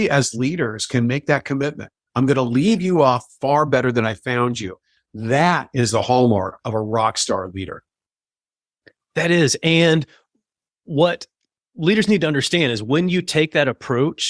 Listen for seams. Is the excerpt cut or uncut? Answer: uncut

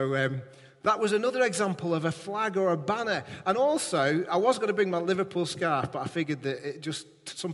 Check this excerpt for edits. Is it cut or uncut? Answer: uncut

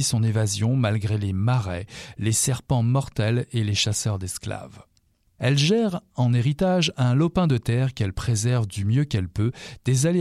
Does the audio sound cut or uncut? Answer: cut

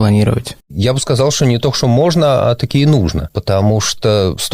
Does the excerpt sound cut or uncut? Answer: uncut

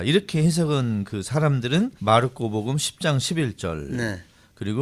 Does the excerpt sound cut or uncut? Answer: cut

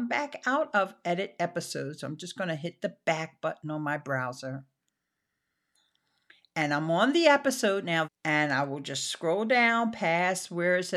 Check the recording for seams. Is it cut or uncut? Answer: cut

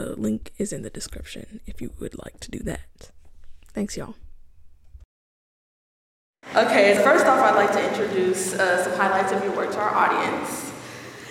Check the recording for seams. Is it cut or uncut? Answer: cut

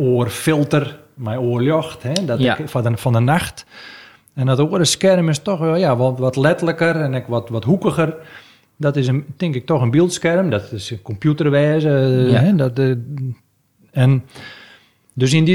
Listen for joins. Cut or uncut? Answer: uncut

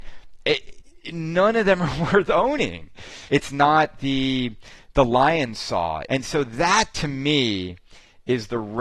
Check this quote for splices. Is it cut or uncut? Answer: cut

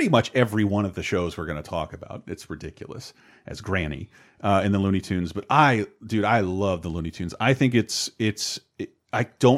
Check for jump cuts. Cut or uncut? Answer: uncut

